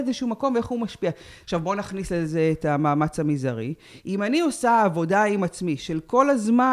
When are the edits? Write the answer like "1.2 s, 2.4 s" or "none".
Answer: 1.4 s